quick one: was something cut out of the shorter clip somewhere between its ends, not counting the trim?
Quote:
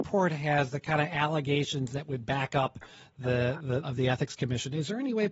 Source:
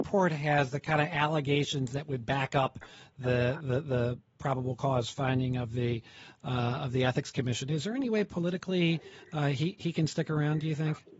yes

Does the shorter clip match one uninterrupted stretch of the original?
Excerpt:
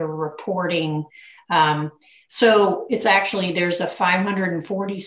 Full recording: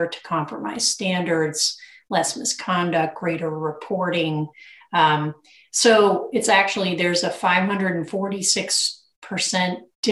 yes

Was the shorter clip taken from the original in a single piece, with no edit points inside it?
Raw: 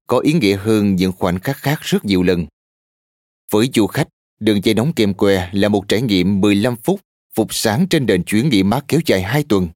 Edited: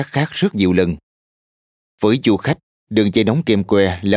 yes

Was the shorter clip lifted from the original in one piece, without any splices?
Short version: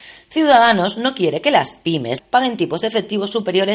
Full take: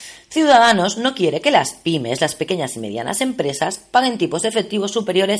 no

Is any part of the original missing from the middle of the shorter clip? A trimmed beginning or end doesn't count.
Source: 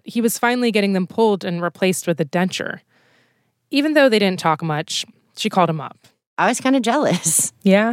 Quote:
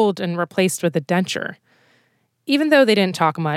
no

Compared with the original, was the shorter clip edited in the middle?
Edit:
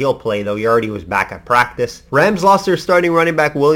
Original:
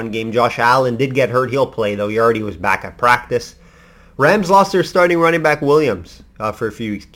yes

